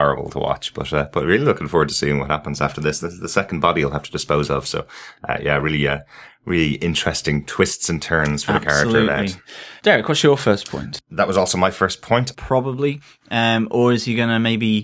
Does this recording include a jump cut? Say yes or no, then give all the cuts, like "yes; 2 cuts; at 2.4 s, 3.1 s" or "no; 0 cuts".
yes; 2 cuts; at 9.8 s, 12.3 s